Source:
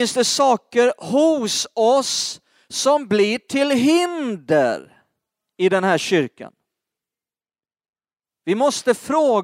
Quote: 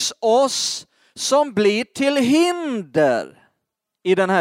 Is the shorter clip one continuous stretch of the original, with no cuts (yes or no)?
yes